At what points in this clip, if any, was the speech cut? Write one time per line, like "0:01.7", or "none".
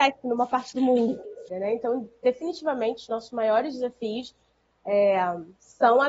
0:01.5